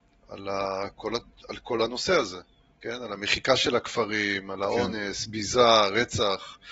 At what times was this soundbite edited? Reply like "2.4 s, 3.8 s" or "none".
none